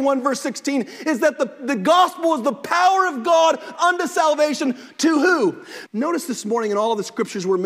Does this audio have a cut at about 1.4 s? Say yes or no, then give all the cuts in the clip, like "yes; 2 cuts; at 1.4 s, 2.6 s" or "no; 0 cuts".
no; 1 cut; at 5.9 s